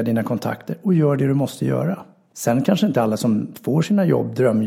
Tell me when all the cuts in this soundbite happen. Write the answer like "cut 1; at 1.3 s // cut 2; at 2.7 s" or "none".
cut 1; at 2.3 s

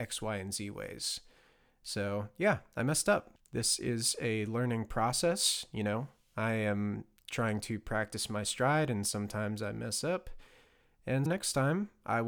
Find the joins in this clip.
cut 1; at 3.4 s // cut 2; at 11.3 s

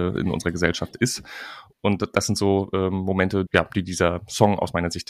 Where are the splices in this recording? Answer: cut 1; at 1.7 s // cut 2; at 3.5 s

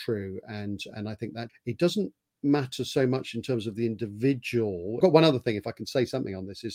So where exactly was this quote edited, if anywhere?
cut 1; at 1.5 s // cut 2; at 5.0 s

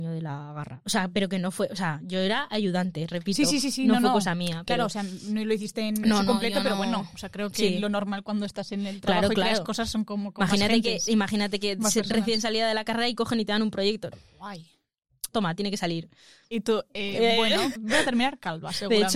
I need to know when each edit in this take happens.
cut 1; at 14.1 s // cut 2; at 15.3 s // cut 3; at 17.8 s

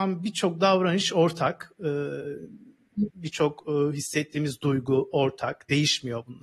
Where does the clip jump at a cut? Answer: cut 1; at 3.1 s

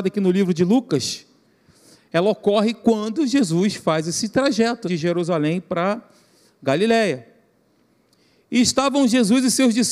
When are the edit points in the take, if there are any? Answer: cut 1; at 4.8 s

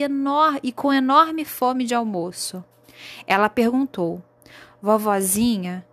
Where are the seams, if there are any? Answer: none

